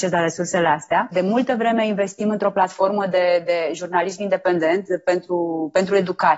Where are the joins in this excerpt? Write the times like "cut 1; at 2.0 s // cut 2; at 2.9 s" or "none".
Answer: cut 1; at 1.1 s